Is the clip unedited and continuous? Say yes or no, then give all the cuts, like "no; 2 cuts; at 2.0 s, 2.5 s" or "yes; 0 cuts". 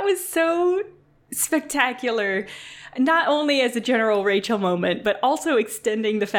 yes; 0 cuts